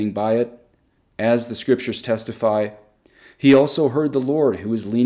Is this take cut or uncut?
cut